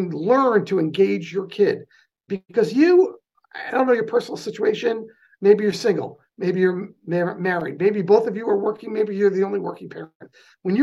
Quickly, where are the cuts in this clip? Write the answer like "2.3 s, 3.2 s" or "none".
2.3 s